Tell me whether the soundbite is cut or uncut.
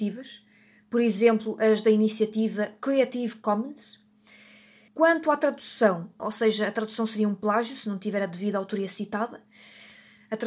cut